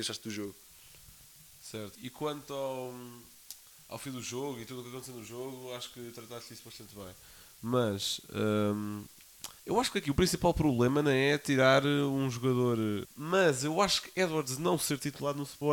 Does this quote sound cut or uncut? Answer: cut